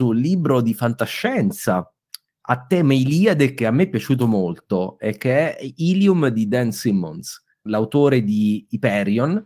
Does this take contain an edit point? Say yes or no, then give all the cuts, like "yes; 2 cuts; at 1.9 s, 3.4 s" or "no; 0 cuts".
yes; 1 cut; at 7.7 s